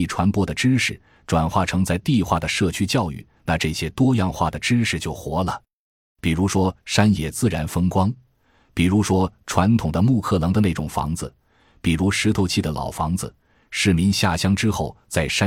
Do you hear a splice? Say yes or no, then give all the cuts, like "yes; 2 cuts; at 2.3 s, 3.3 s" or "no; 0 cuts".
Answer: no; 0 cuts